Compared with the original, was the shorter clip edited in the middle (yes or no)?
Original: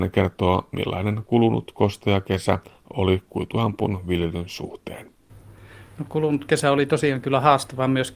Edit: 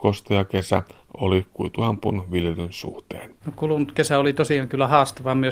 yes